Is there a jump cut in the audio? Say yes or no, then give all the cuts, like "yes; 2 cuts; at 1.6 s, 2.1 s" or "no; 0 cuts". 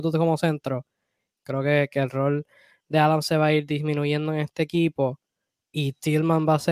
yes; 1 cut; at 1.3 s